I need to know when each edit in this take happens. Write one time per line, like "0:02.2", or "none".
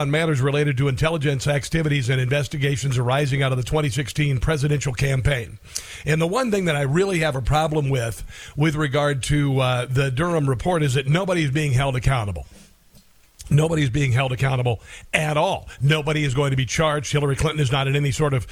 none